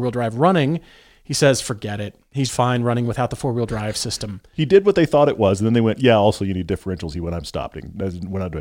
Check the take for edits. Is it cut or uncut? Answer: cut